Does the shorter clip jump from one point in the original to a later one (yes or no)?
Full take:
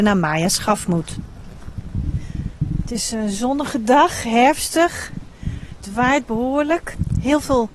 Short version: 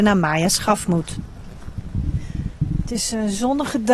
no